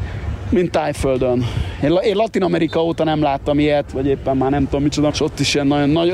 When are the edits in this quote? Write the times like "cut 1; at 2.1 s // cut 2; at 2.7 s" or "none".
cut 1; at 3.9 s // cut 2; at 5.1 s